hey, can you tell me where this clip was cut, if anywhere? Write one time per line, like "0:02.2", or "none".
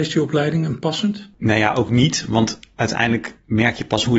none